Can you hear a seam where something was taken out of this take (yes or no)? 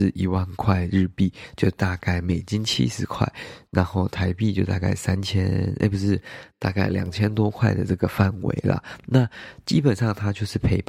no